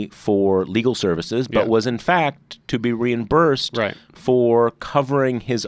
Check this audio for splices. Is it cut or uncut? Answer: uncut